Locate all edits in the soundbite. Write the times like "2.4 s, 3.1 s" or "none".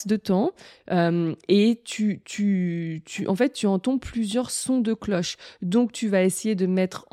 none